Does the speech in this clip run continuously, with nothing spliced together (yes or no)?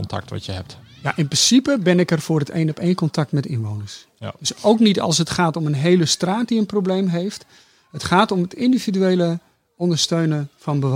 yes